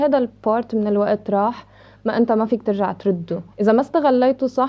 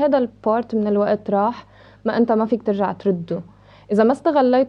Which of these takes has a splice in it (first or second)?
first